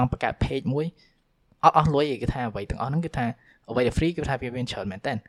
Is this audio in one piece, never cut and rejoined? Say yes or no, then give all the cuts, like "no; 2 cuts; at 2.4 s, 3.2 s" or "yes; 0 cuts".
no; 1 cut; at 3.9 s